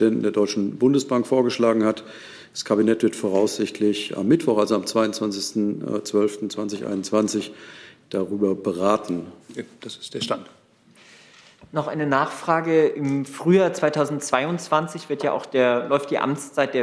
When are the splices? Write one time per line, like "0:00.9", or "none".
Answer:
0:09.4